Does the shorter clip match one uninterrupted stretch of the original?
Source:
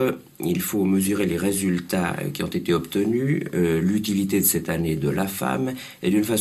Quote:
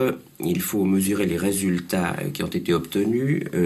yes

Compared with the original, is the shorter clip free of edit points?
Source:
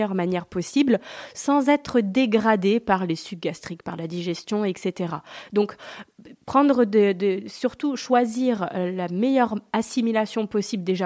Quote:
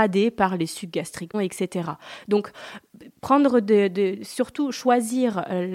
no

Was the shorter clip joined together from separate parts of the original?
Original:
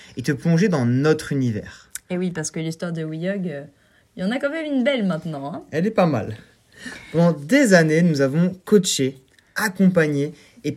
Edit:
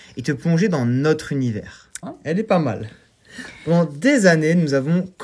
yes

